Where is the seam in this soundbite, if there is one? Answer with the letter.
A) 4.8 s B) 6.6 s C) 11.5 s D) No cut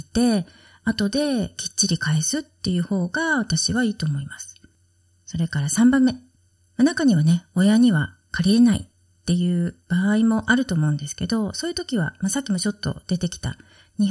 B